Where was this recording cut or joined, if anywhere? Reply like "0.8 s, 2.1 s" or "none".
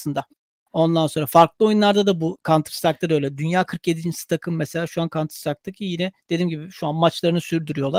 none

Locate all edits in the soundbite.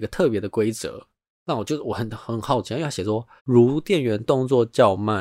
3.4 s

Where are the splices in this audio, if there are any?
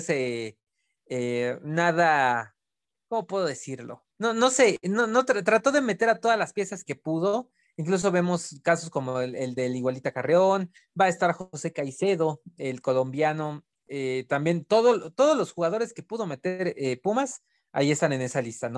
4.1 s

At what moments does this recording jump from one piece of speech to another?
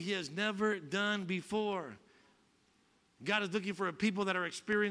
none

